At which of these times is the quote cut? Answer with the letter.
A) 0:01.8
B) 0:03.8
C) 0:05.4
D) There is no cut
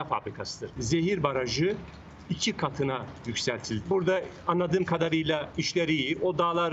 B